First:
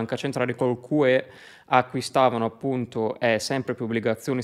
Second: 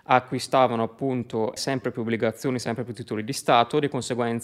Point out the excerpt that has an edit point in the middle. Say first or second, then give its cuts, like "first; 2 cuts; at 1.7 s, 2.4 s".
second; 1 cut; at 1.6 s